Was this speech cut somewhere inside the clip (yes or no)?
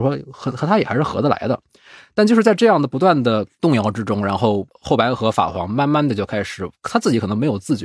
no